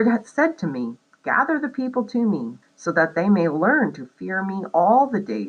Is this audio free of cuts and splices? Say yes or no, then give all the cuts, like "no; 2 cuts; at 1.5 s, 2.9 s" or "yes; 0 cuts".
no; 1 cut; at 2.6 s